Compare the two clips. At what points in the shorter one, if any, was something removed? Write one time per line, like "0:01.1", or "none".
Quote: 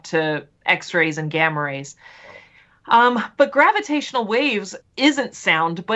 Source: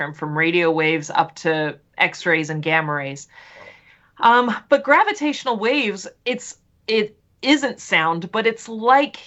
0:04.8